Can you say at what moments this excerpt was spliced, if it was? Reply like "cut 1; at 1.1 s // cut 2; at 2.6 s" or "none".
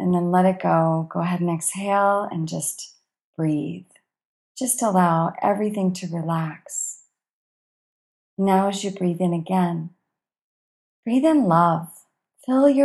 cut 1; at 4.4 s